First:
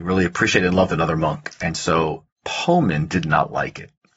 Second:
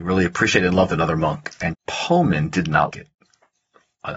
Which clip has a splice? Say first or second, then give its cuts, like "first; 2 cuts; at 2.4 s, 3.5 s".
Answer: second; 2 cuts; at 1.7 s, 2.9 s